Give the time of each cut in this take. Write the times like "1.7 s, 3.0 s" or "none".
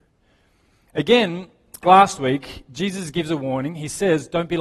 1.8 s